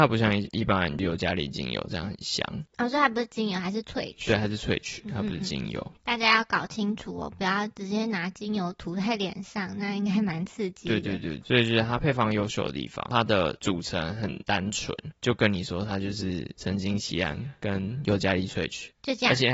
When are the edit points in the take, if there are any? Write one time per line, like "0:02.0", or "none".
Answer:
none